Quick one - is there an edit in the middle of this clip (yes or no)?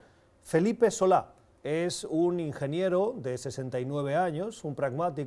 no